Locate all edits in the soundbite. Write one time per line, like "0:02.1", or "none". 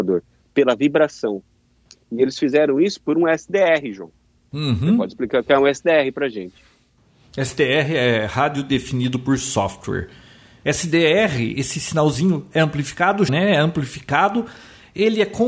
0:10.6
0:13.3

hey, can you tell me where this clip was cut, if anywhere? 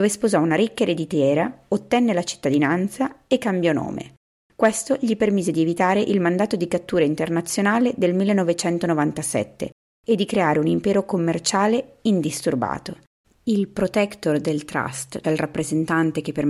0:13.2
0:15.2

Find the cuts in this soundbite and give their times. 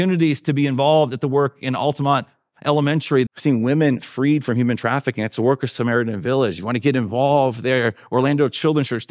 0:03.3

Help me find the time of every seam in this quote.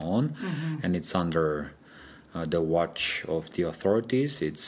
none

